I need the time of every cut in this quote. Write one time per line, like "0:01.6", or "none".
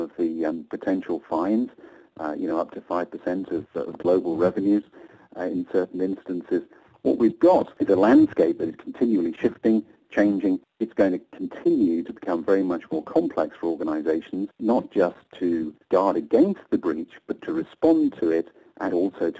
none